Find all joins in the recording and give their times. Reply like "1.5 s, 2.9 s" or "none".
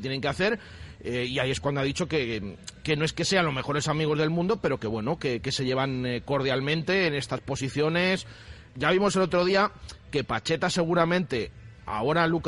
8.7 s